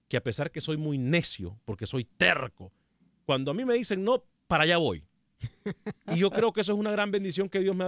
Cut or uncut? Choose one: uncut